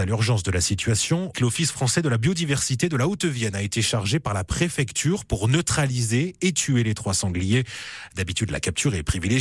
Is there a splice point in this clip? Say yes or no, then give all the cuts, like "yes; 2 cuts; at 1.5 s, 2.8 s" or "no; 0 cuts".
yes; 1 cut; at 1.3 s